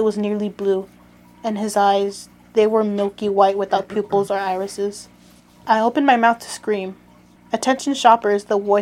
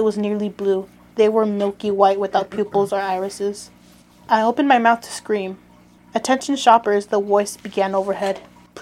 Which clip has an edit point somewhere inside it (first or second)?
second